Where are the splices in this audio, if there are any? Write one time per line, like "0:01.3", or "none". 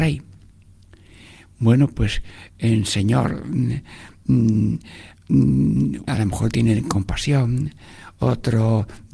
0:06.1